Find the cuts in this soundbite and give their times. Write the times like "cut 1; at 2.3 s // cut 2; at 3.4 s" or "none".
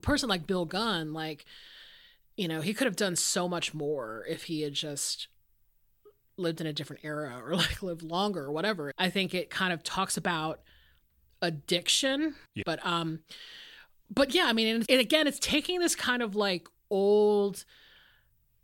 cut 1; at 8.9 s // cut 2; at 12.6 s // cut 3; at 14.9 s